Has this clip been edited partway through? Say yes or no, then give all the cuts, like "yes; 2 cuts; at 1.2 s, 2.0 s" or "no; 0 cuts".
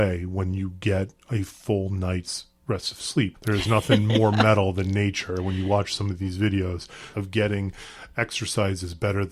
yes; 2 cuts; at 3.3 s, 7.1 s